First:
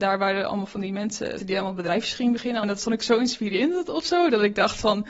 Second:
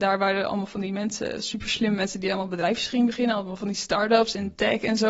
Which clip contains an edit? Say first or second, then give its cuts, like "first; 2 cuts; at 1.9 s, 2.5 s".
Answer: first; 2 cuts; at 1.4 s, 2.6 s